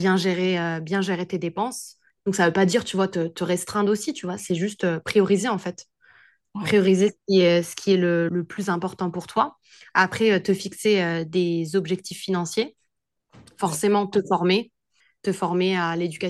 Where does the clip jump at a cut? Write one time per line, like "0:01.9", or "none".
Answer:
0:08.3